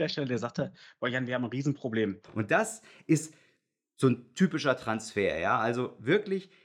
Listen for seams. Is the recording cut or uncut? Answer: cut